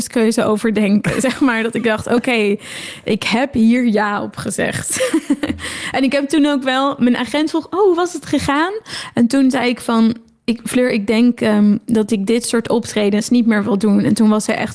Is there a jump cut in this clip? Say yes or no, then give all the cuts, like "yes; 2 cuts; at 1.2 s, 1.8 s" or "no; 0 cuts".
no; 0 cuts